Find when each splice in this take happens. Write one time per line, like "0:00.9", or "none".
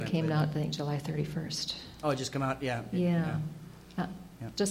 none